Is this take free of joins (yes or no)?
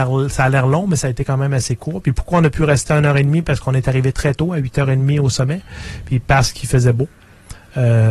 yes